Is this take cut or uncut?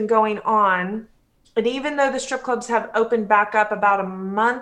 uncut